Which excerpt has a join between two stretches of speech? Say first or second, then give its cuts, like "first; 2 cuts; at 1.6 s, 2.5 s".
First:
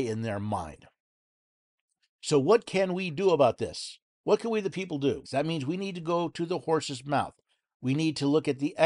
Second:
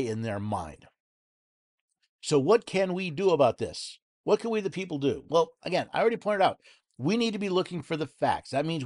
first; 1 cut; at 5.2 s